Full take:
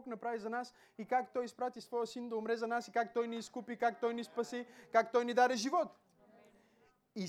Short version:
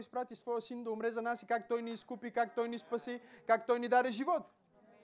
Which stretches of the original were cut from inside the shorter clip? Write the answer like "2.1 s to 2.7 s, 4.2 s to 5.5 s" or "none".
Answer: none